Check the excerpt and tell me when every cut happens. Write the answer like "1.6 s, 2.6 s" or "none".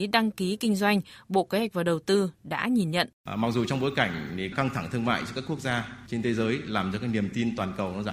3.1 s